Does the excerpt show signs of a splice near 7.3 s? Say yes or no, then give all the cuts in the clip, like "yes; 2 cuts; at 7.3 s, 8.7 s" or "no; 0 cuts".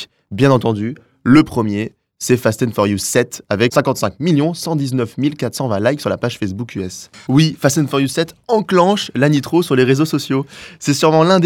yes; 1 cut; at 7.3 s